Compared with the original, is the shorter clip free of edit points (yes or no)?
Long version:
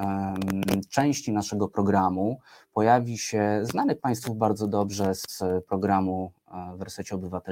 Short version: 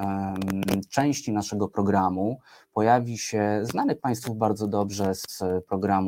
yes